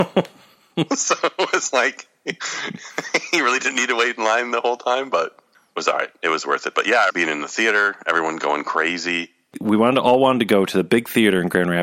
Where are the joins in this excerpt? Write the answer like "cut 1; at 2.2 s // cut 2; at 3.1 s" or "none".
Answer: cut 1; at 7.1 s // cut 2; at 9.5 s